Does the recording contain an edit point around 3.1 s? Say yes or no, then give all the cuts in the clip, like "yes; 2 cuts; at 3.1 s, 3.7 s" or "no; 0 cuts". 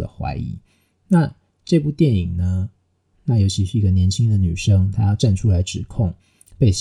yes; 1 cut; at 3.1 s